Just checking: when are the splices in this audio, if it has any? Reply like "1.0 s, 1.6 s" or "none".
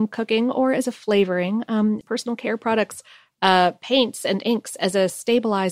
2.0 s, 3.3 s